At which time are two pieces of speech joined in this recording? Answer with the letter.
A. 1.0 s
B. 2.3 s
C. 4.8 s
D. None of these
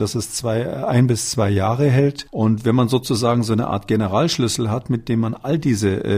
B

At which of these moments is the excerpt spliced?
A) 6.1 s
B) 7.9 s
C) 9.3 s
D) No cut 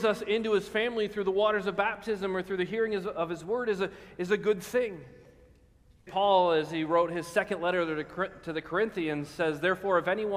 A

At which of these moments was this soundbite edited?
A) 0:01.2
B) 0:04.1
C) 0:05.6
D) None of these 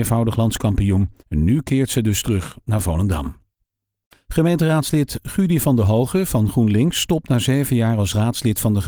A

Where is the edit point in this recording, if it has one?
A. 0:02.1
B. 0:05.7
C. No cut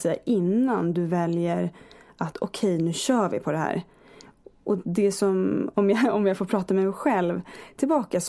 B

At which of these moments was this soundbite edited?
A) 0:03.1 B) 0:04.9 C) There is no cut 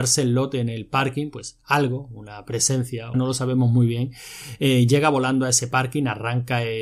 A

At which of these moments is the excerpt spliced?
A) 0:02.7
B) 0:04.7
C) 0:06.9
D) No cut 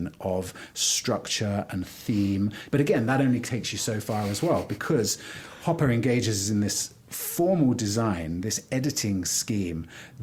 A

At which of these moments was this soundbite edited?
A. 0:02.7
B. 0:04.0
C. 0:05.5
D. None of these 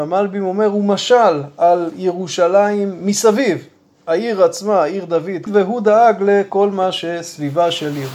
C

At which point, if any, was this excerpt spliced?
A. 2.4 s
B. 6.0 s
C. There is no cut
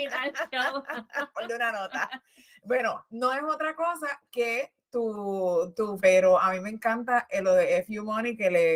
B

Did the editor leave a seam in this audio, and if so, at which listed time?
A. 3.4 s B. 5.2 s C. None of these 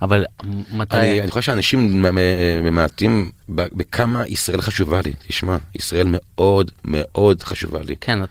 A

